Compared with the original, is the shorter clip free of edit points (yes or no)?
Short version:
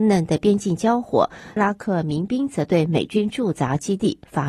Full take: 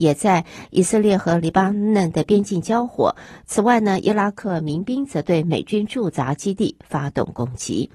no